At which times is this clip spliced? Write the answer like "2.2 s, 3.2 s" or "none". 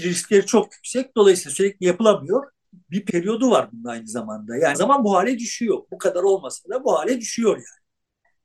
2.7 s, 4.7 s